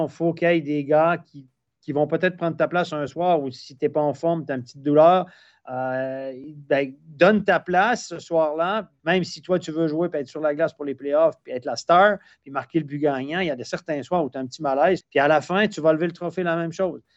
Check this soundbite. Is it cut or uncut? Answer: cut